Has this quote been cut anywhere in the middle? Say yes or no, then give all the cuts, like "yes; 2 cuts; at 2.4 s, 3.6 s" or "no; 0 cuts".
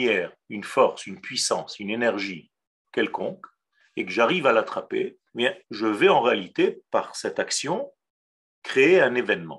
yes; 1 cut; at 5.3 s